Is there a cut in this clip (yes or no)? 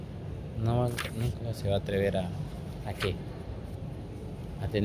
no